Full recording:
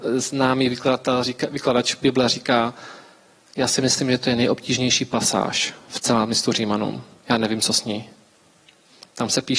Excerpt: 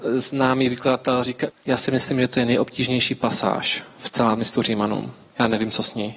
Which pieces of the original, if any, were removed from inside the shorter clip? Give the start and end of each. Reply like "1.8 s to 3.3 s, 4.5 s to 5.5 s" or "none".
1.5 s to 3.4 s